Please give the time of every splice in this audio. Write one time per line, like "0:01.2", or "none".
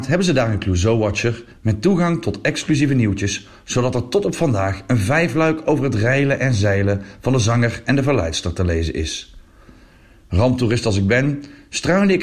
none